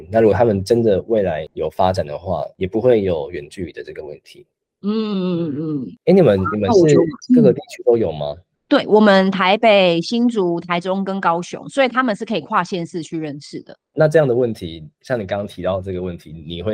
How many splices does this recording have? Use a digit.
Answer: 0